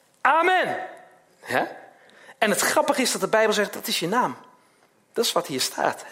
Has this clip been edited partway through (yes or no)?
no